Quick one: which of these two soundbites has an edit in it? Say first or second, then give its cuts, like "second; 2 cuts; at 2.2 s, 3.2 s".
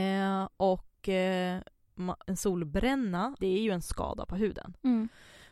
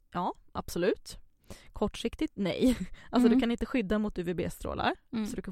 first; 2 cuts; at 2.2 s, 3.4 s